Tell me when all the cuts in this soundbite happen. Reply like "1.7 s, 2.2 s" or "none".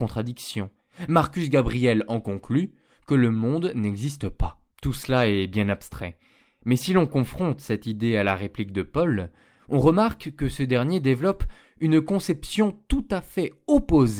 4.7 s